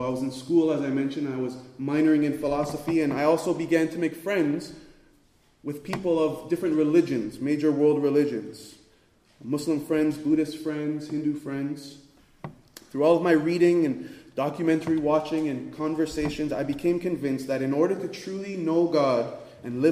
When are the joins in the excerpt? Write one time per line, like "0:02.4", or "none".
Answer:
none